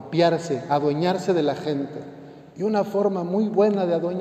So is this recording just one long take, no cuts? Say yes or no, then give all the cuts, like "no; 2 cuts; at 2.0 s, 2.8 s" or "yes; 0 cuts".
no; 1 cut; at 2.5 s